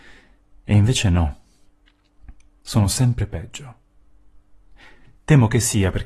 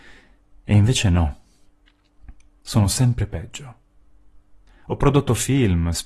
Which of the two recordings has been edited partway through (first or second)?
second